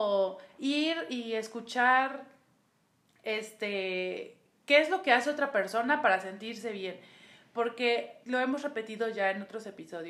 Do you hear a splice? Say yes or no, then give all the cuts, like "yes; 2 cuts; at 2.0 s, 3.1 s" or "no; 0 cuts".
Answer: yes; 1 cut; at 8.2 s